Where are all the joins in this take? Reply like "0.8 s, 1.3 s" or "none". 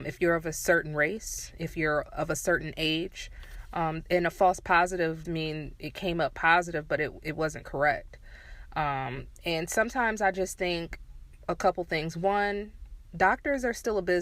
5.2 s